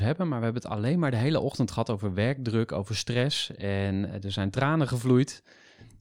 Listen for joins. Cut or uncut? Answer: uncut